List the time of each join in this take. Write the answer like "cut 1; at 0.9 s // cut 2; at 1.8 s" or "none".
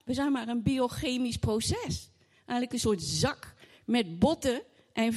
none

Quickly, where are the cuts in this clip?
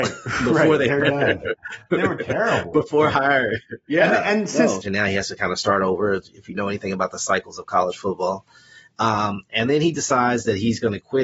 cut 1; at 4.8 s

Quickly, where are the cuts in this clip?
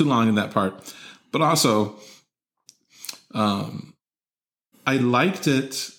cut 1; at 4.7 s

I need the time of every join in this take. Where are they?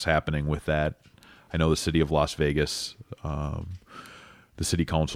none

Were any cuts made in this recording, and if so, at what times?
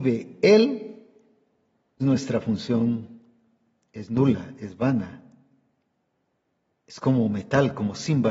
cut 1; at 2.0 s

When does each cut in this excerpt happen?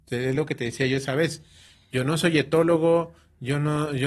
none

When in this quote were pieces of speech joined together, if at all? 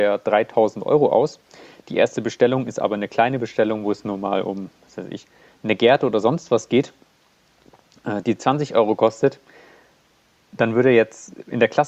none

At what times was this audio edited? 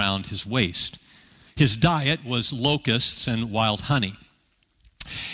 none

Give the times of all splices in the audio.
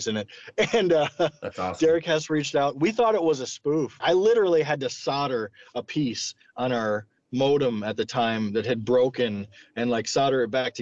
cut 1; at 4.0 s

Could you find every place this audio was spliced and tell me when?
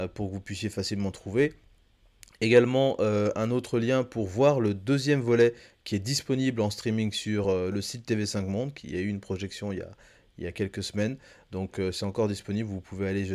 none

